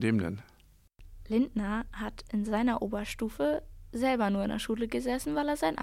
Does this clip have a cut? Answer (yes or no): no